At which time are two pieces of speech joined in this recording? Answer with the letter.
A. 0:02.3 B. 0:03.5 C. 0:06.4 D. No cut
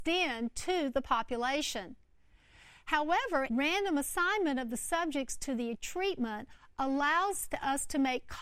B